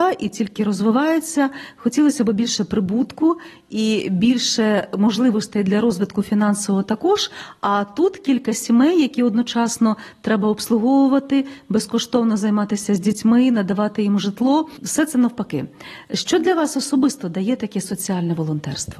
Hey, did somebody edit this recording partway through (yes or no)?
no